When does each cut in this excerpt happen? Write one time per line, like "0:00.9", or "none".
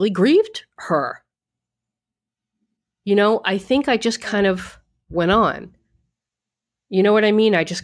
none